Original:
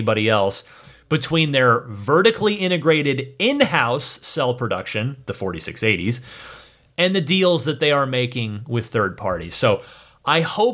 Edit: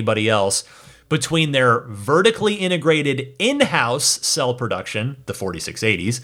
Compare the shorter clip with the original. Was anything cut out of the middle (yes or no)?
no